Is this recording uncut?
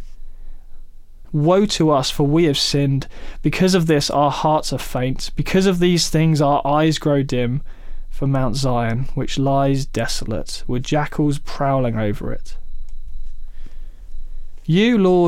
no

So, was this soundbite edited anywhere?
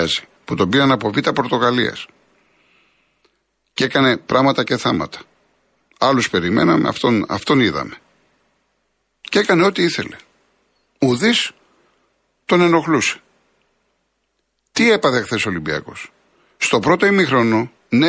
no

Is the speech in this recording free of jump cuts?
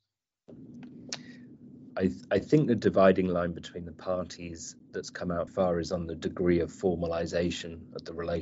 no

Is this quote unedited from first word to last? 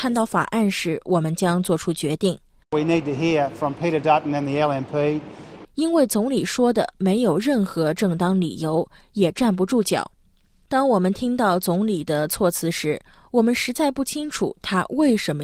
no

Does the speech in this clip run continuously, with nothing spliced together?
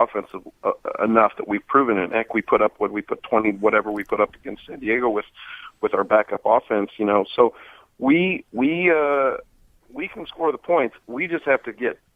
yes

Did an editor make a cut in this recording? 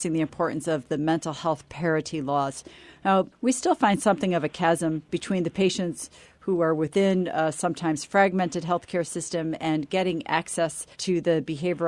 yes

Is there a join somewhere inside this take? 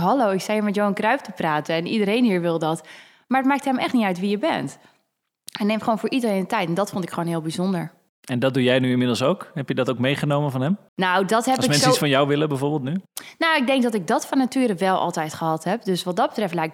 yes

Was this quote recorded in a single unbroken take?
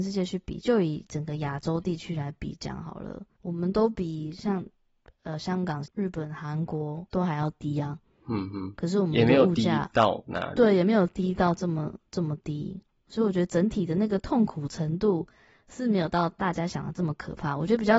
no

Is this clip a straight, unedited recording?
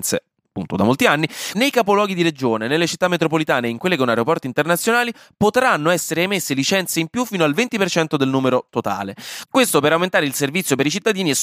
no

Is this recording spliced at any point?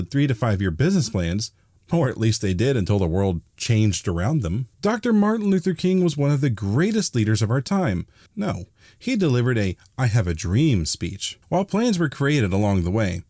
yes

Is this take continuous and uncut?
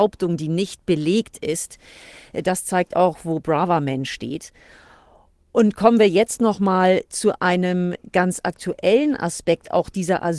yes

